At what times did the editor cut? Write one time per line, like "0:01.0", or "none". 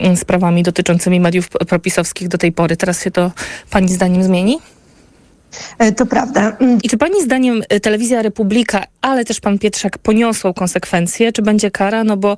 0:06.8